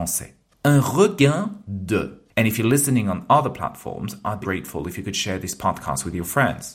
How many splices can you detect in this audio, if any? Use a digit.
2